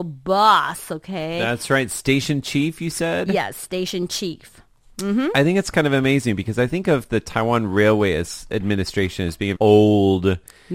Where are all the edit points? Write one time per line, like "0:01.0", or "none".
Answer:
0:09.6